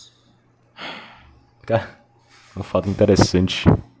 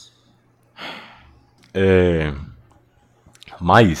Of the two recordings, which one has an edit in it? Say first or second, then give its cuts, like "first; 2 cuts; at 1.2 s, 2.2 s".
second; 1 cut; at 1.6 s